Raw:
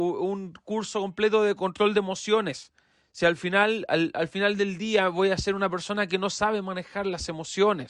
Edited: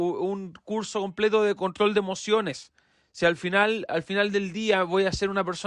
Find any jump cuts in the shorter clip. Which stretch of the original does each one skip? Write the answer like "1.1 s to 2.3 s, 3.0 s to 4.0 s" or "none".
3.9 s to 4.1 s